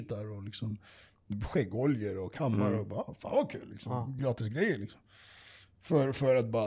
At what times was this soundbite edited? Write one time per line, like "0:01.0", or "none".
none